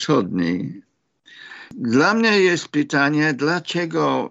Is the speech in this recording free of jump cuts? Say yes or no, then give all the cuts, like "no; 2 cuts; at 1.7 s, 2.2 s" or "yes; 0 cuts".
yes; 0 cuts